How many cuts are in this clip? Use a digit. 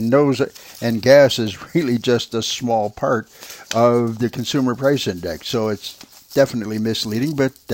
0